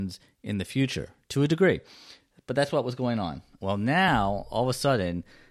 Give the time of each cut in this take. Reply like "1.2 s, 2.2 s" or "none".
3.6 s